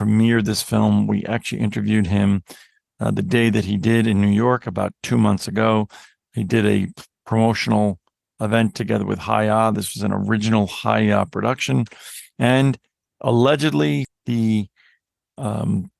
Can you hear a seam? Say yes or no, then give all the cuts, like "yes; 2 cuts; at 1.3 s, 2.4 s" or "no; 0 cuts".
yes; 1 cut; at 14.0 s